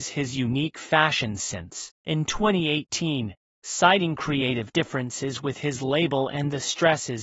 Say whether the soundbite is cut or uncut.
cut